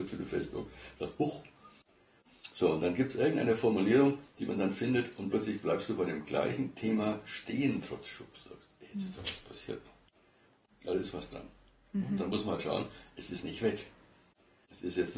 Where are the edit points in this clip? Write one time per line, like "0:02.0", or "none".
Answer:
none